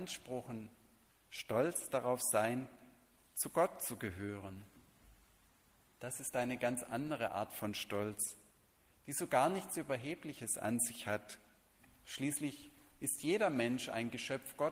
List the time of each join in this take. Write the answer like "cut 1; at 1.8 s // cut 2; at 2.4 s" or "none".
cut 1; at 1.1 s